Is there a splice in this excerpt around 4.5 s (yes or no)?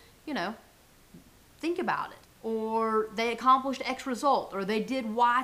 no